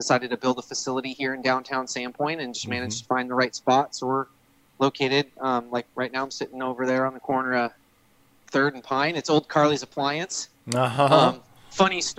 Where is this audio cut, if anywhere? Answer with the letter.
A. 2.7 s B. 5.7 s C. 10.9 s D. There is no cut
D